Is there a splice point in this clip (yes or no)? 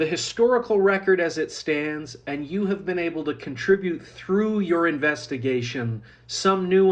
no